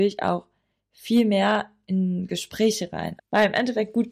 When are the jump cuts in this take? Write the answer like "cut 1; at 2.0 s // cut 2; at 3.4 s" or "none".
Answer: cut 1; at 3.2 s